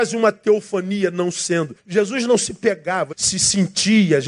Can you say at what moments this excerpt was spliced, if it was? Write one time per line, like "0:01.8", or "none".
0:01.8
0:03.1